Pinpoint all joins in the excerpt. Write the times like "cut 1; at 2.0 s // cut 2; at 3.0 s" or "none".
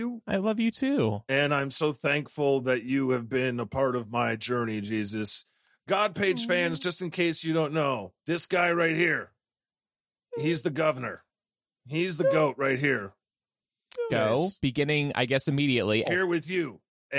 cut 1; at 8.2 s // cut 2; at 14.1 s // cut 3; at 16.0 s